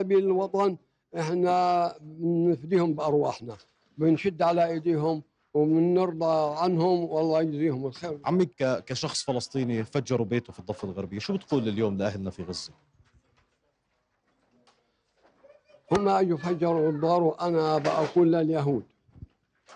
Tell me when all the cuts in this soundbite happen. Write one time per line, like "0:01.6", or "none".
0:08.5